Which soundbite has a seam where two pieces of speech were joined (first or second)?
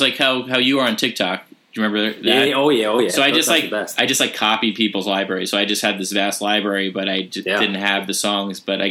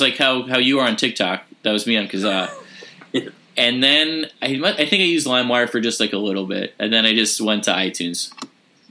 first